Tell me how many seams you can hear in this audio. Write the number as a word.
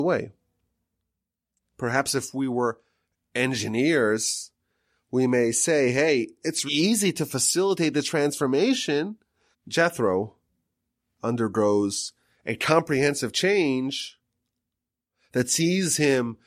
two